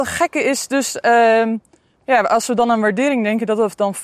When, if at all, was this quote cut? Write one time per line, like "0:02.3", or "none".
none